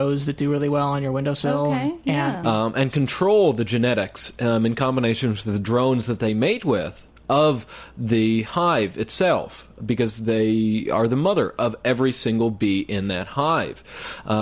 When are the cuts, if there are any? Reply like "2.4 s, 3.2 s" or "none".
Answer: 2.4 s